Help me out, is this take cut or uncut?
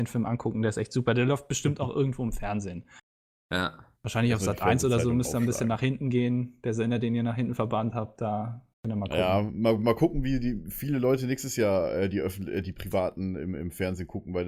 cut